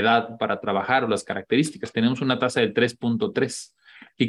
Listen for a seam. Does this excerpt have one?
no; 0 cuts

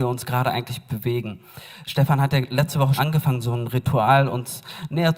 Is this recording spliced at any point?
yes; 1 cut; at 3.0 s

